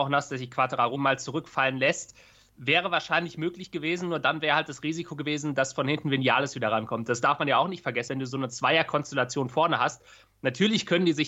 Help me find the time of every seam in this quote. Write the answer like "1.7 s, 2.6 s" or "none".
0.9 s, 8.1 s